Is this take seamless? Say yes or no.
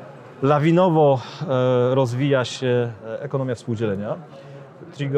yes